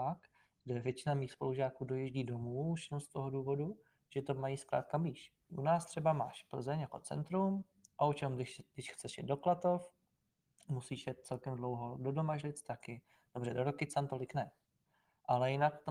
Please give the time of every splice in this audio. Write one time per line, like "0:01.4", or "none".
0:05.5

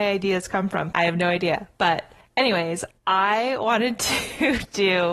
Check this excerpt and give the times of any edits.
0:00.9

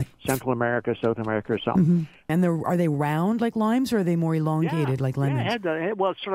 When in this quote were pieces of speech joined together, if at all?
0:02.3

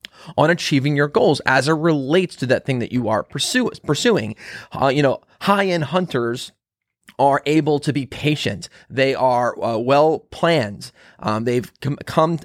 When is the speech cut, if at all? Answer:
none

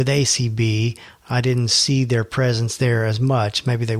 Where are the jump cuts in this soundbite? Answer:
none

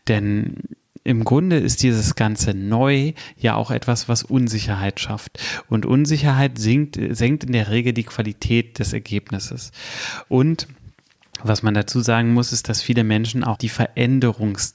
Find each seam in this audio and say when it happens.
0:10.3
0:13.5

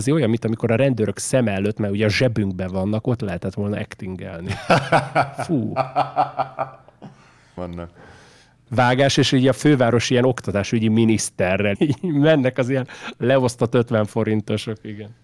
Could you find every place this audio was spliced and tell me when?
0:07.6
0:11.7

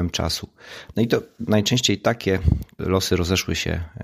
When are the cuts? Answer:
0:00.9
0:02.8

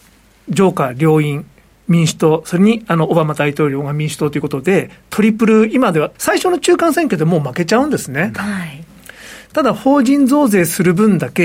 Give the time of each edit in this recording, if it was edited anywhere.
0:06.1
0:08.3

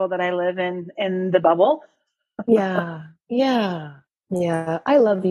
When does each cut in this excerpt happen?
0:04.1

